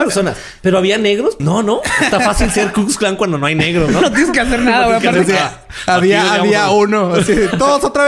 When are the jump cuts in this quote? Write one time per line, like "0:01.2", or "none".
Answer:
0:01.4